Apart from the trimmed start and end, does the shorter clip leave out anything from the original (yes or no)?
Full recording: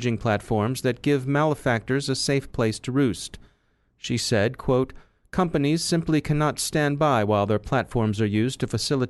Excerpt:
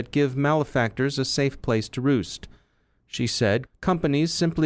yes